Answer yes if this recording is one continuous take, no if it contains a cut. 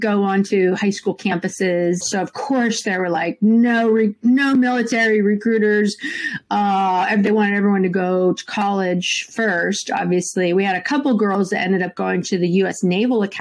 no